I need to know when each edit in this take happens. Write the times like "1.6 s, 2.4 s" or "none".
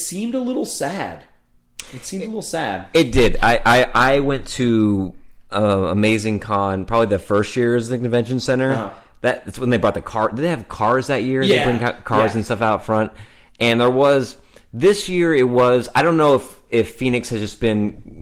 none